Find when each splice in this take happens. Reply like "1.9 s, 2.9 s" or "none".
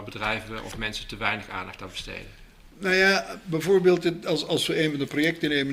none